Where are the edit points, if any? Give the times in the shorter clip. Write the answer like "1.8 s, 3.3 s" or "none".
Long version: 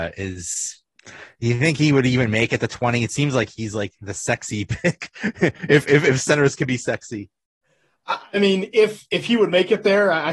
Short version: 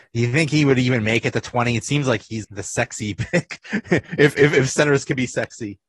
2.4 s